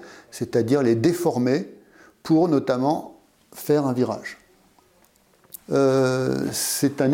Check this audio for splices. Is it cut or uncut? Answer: cut